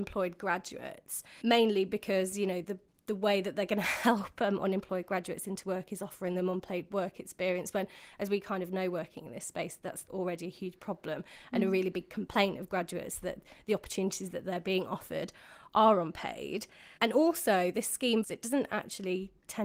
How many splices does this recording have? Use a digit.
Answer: 2